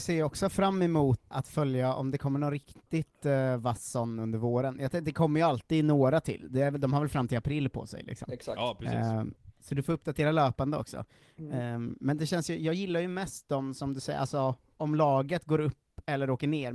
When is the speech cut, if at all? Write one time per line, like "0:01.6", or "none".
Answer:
0:01.3

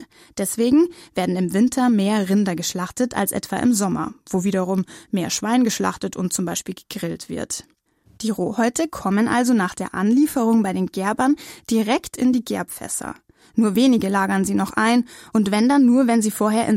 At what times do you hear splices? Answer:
0:08.1

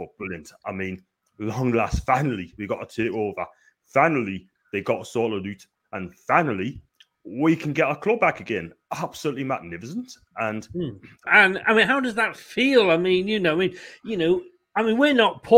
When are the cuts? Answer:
0:11.3

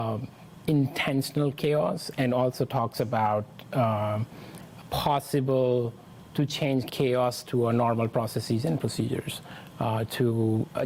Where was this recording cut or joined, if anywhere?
0:04.8
0:06.9

